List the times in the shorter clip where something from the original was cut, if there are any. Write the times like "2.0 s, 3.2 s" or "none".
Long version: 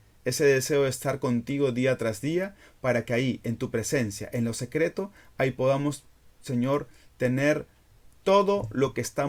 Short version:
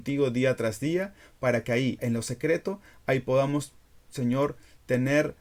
2.0 s